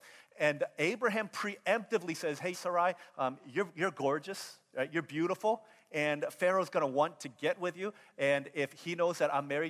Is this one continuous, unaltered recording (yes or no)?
no